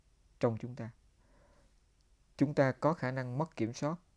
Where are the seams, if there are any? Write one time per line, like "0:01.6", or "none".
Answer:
none